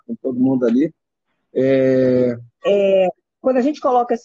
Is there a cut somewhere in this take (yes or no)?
yes